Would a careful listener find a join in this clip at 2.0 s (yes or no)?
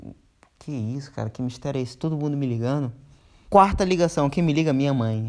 no